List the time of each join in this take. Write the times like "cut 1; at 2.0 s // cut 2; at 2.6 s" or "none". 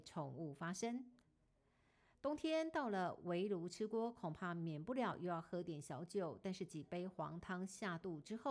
none